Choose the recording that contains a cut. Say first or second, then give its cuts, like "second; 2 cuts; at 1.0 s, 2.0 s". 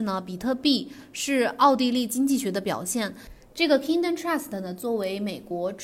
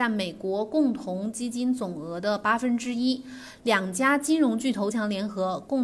second; 1 cut; at 4.9 s